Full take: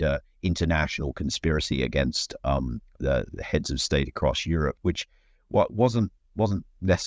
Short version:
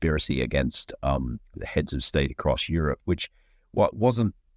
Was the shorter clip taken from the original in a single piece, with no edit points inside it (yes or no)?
no